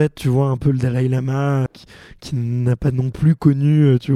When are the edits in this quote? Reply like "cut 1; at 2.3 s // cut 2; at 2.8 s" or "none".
cut 1; at 1.7 s